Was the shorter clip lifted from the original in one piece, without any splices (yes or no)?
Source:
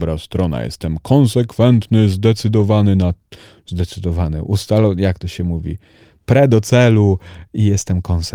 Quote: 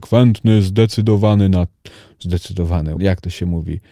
no